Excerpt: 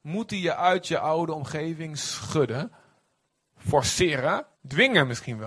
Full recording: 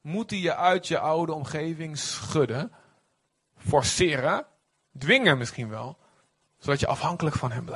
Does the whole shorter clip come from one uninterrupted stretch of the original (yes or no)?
no